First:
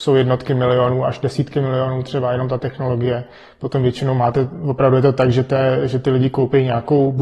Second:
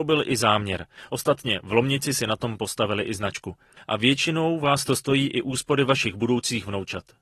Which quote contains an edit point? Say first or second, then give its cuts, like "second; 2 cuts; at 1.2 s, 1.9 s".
second; 2 cuts; at 1.0 s, 3.8 s